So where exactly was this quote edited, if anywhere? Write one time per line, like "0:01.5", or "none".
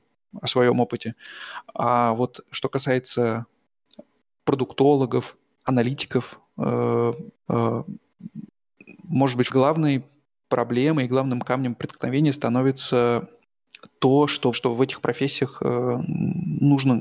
0:07.5
0:09.5
0:14.5